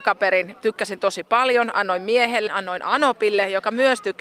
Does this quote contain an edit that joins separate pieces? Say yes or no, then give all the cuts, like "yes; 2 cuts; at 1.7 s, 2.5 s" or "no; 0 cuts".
yes; 1 cut; at 2.5 s